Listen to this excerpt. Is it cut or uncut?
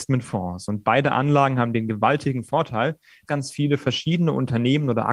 cut